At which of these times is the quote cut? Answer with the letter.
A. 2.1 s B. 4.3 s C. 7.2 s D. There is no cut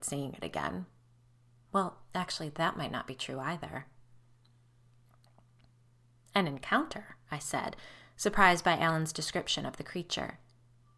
D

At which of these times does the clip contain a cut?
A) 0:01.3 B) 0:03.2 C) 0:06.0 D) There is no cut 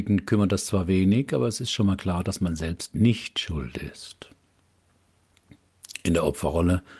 D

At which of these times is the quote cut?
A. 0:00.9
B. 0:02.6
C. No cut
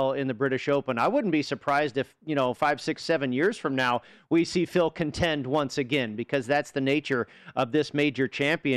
B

